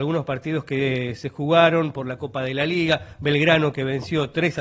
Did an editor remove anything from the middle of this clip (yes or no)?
no